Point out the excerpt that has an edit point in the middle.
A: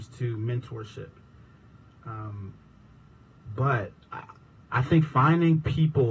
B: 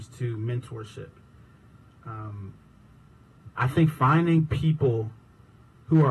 B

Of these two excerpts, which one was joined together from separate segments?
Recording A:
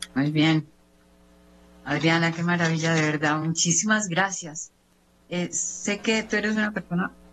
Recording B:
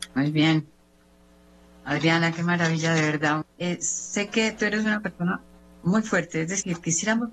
B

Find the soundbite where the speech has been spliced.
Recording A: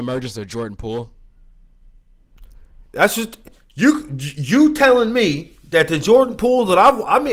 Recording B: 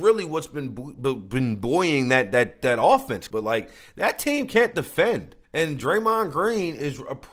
B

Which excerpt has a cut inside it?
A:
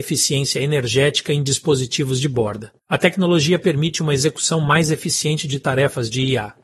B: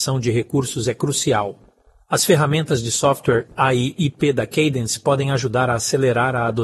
A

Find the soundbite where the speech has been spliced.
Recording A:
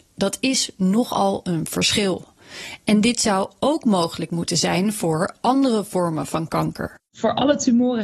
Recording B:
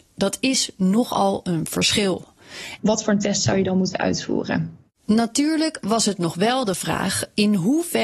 B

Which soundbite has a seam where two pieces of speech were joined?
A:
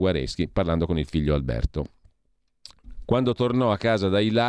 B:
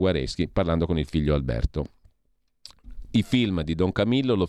A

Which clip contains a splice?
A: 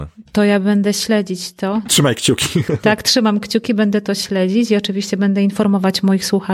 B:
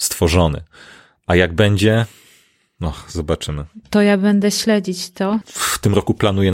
B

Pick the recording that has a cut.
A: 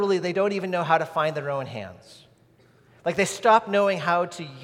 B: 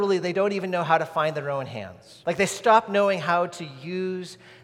B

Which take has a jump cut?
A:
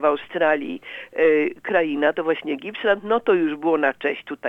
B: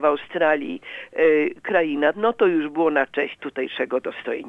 B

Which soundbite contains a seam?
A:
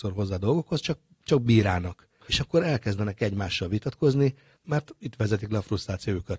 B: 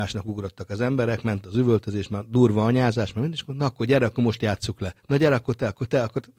A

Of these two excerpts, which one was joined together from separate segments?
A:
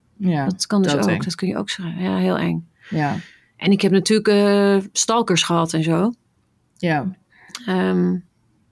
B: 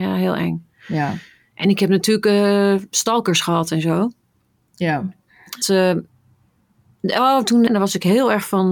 B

